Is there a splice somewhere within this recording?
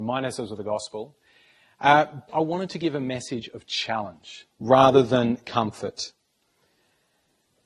yes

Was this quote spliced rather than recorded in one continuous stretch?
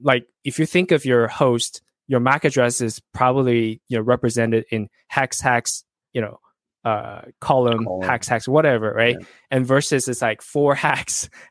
no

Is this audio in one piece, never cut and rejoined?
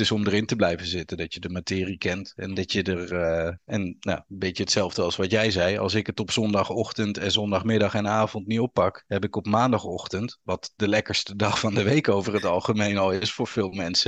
no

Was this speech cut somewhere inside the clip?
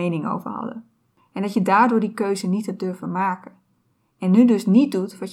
no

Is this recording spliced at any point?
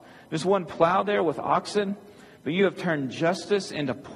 no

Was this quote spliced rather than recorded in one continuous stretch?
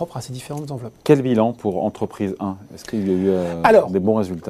no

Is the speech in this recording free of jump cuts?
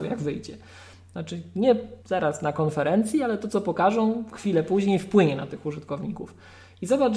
no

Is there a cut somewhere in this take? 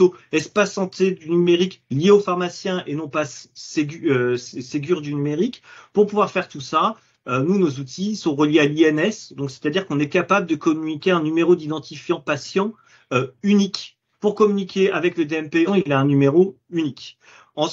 yes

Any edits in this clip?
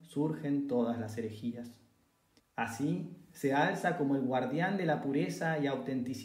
yes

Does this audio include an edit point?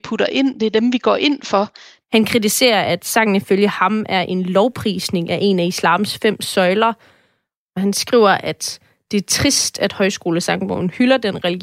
yes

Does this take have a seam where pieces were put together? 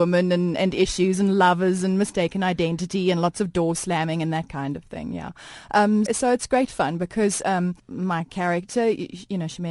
yes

